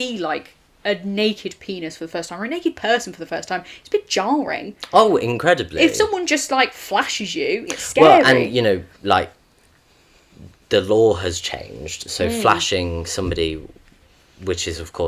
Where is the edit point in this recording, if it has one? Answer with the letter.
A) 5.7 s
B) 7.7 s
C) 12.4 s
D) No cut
B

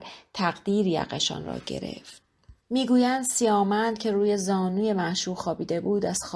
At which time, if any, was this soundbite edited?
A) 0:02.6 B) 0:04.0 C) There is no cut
A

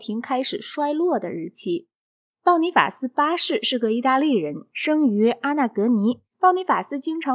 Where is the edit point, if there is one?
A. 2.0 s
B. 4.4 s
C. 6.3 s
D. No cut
C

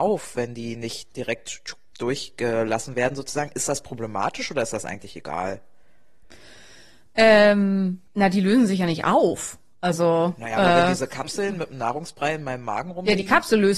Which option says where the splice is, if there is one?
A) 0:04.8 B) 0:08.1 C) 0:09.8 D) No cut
B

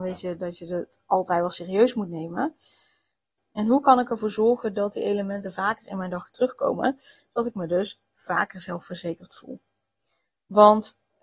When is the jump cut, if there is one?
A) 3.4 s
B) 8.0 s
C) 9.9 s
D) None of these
A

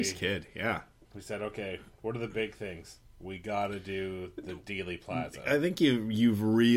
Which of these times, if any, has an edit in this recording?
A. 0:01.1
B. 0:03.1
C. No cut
A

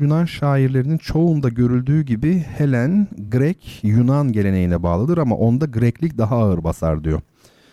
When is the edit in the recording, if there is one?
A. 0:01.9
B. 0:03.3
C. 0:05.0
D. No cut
D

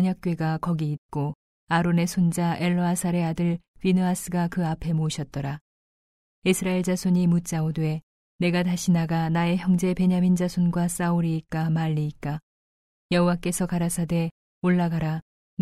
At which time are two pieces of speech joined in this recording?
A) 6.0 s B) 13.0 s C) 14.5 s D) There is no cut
D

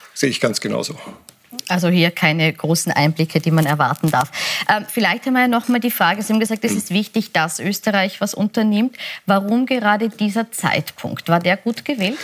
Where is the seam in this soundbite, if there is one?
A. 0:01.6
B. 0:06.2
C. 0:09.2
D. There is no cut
D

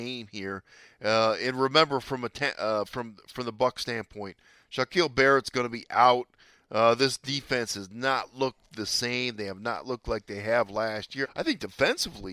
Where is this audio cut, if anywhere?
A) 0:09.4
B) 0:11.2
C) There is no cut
B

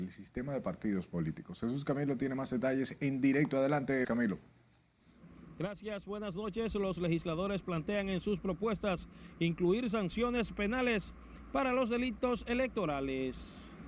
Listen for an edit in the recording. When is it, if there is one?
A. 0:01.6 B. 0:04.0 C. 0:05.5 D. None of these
B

